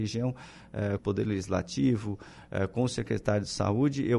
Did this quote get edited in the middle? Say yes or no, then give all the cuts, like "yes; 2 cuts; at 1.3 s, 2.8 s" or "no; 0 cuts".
yes; 1 cut; at 1.0 s